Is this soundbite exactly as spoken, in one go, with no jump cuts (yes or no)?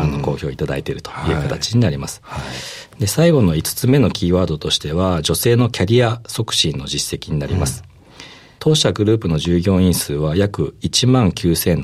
yes